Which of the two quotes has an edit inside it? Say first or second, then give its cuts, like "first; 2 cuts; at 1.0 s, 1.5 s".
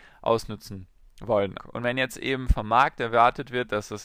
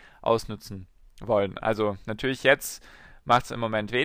first; 1 cut; at 1.6 s